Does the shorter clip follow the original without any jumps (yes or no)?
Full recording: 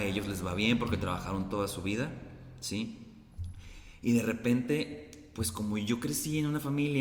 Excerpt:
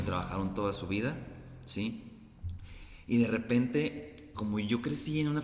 no